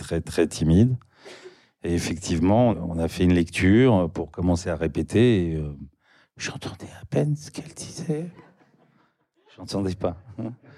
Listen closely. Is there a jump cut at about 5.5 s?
no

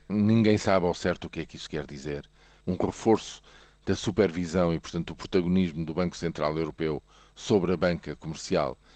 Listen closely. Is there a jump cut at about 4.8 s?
no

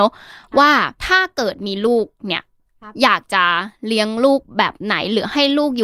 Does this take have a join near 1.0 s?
yes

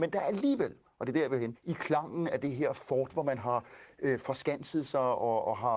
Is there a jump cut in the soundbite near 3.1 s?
no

